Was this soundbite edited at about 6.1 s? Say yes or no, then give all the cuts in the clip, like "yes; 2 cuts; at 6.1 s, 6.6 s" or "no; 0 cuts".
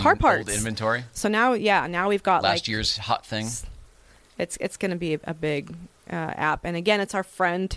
no; 0 cuts